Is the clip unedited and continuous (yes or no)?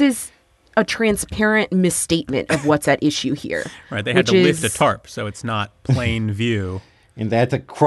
yes